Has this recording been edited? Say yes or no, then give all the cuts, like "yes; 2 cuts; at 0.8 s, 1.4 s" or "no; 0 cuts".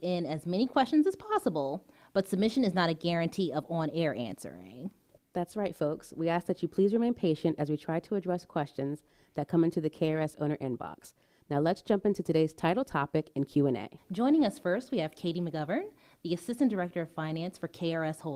no; 0 cuts